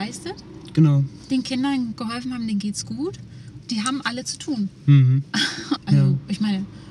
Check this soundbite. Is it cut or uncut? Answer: cut